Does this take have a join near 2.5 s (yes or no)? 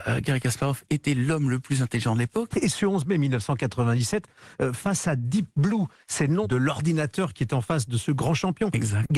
yes